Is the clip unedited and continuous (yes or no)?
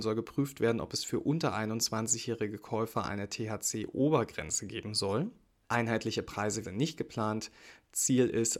no